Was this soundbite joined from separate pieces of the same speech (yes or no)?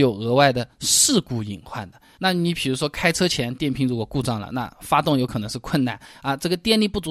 no